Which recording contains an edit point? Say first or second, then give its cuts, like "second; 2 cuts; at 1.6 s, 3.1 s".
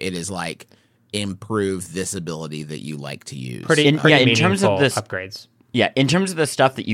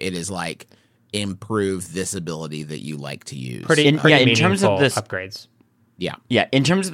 first; 1 cut; at 5.6 s